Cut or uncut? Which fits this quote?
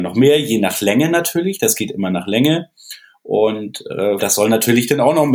cut